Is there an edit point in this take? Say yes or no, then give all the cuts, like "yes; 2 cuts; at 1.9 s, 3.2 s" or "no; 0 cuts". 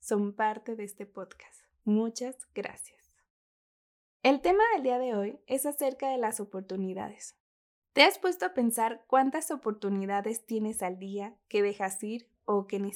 no; 0 cuts